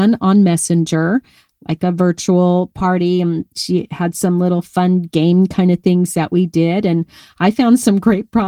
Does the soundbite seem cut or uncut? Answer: uncut